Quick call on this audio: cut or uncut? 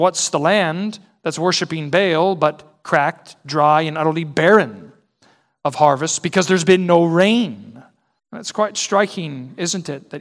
cut